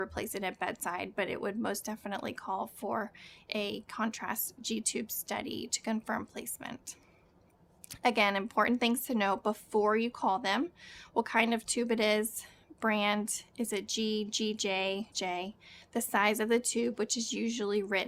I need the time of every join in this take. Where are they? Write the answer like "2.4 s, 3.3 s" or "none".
15.1 s

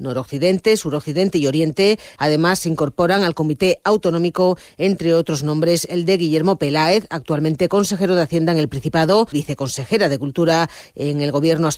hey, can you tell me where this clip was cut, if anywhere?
2.2 s, 9.3 s

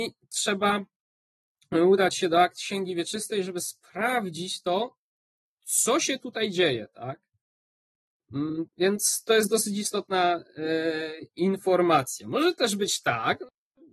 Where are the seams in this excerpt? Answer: 8.7 s

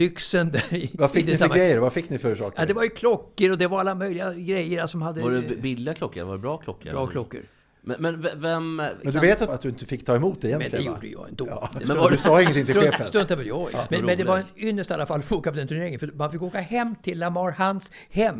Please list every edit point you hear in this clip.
9.5 s

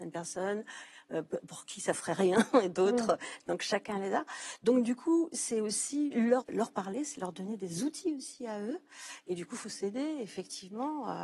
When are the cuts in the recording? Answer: 6.4 s

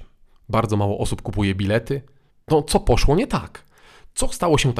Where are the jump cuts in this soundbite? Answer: 2.5 s

